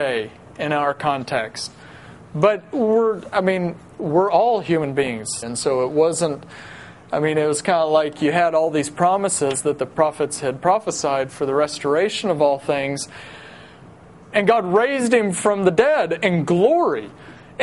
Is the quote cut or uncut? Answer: cut